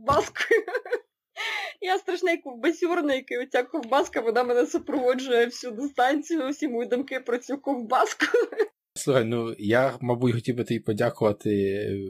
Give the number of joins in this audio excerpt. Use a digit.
1